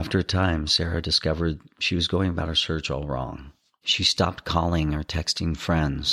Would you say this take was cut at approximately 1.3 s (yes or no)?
no